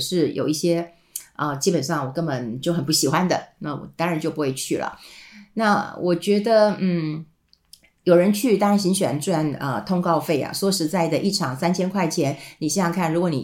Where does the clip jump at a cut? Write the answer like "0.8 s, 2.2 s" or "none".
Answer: none

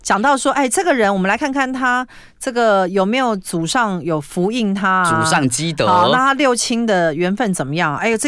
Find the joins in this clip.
none

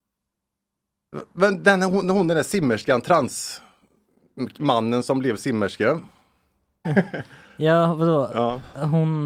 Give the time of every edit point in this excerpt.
6.8 s

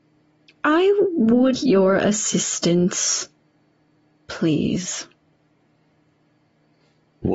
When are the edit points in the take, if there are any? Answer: 1.5 s

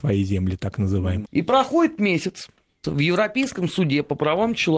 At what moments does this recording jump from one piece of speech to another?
1.3 s, 2.8 s

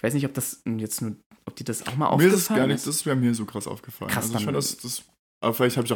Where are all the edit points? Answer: none

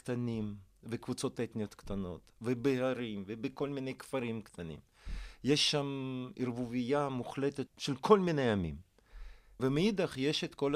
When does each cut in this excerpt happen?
7.7 s, 9.6 s

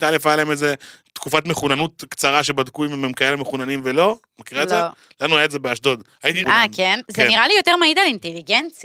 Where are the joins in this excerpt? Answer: 6.4 s

